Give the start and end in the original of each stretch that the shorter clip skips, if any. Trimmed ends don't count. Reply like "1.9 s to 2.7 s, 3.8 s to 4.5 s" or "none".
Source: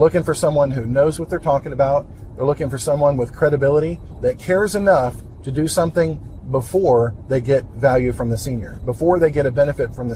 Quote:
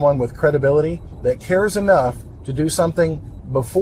none